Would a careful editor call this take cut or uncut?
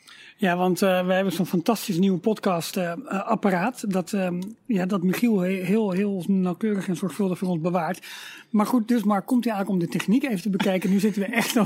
uncut